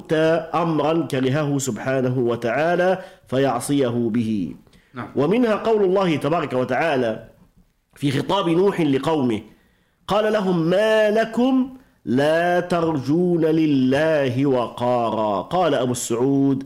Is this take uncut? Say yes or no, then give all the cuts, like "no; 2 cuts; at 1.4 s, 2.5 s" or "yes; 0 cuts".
yes; 0 cuts